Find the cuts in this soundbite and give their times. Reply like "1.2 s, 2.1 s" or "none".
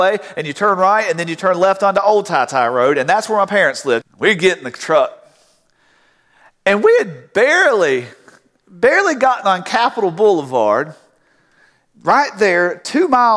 4.0 s